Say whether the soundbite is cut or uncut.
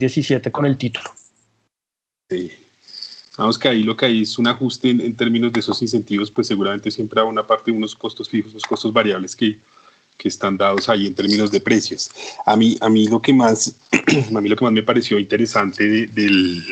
cut